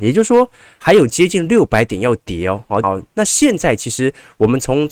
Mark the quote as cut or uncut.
cut